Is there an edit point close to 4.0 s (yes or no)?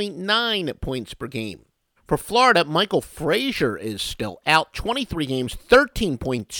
no